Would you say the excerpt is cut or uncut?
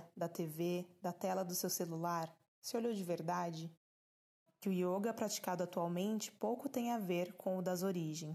cut